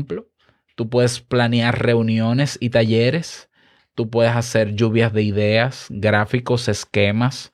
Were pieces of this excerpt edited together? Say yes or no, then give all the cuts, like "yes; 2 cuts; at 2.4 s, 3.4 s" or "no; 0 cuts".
no; 0 cuts